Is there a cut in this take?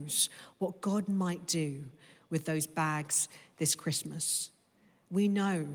no; 0 cuts

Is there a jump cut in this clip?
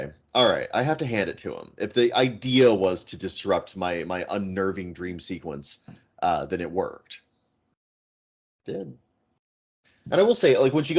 no; 0 cuts

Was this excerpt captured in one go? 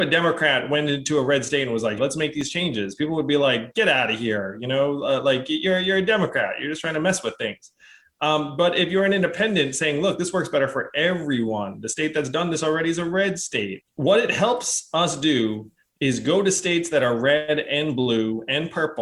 no; 2 cuts; at 2.0 s, 13.8 s

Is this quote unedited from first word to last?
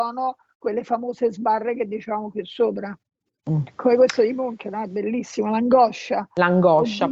yes; 0 cuts

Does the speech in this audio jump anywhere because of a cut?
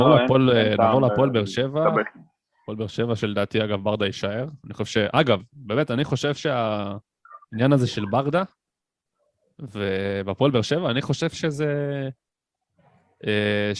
no; 0 cuts

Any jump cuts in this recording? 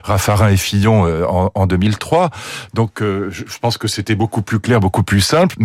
no; 0 cuts

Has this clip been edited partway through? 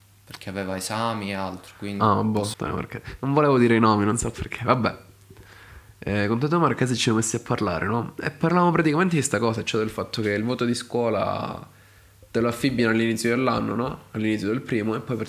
yes; 1 cut; at 2.5 s

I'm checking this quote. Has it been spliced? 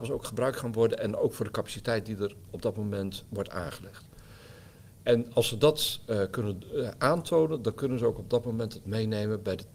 no; 0 cuts

